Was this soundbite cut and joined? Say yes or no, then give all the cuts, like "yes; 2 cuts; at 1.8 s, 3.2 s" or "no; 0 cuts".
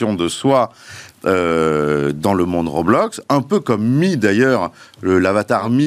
no; 0 cuts